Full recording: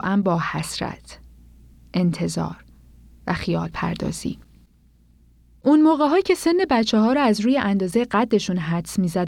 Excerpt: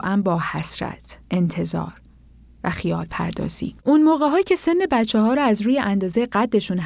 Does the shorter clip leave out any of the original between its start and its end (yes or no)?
yes